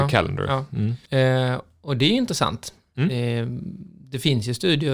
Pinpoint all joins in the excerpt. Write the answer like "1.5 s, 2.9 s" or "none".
1.1 s